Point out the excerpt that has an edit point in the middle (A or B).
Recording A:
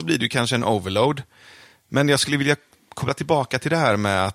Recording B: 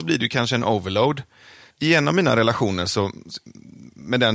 B